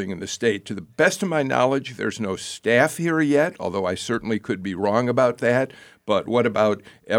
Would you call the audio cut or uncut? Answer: uncut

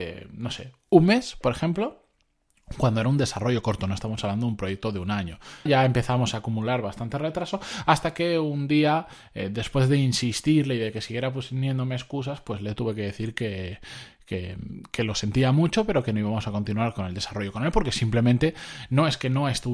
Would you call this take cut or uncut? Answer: cut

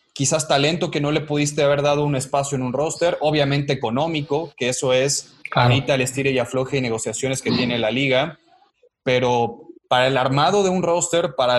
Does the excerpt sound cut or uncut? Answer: uncut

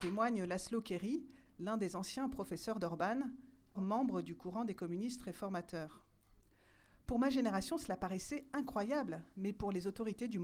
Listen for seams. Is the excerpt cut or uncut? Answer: cut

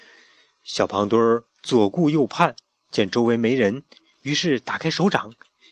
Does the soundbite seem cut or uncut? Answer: uncut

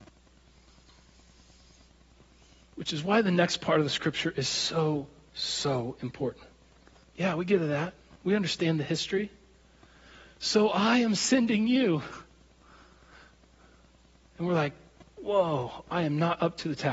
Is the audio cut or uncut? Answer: cut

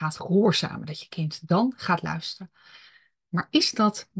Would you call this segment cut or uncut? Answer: uncut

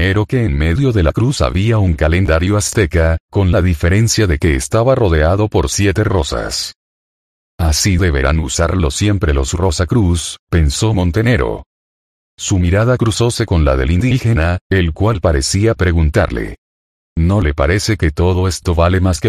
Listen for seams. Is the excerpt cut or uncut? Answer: uncut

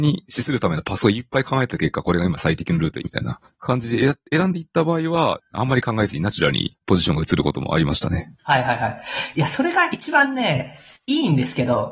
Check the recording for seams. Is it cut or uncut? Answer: cut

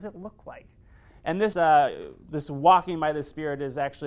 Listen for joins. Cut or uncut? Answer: cut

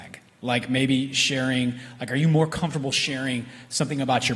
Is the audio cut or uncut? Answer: uncut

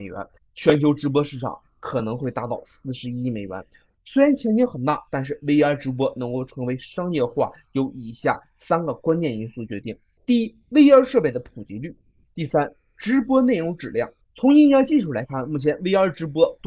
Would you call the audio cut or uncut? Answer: cut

